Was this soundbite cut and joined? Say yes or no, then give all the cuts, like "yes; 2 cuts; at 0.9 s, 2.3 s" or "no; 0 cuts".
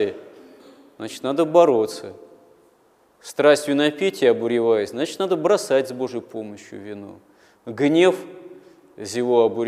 no; 0 cuts